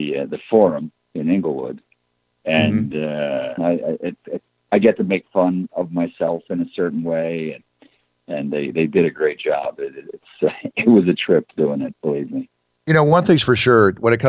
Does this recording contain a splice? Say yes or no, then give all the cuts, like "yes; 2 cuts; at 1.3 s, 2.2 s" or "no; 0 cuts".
yes; 1 cut; at 3.6 s